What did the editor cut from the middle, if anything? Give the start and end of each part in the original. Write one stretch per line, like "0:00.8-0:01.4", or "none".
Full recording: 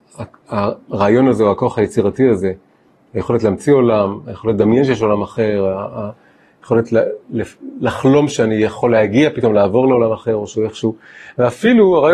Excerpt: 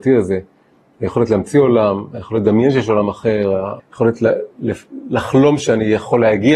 0:05.9-0:06.5